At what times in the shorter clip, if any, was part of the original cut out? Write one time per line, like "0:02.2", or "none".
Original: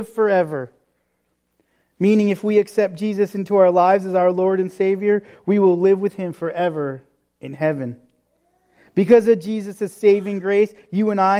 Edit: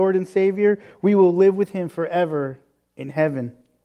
none